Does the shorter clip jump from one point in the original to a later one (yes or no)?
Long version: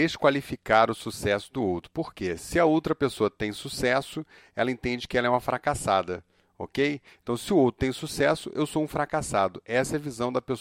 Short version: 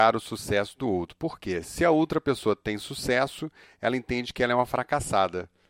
no